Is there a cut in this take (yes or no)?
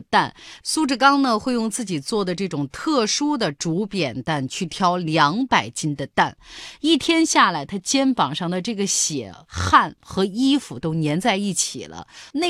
no